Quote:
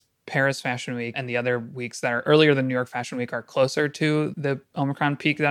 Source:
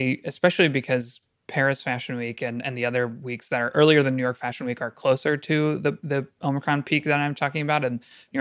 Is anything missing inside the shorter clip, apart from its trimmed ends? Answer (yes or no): yes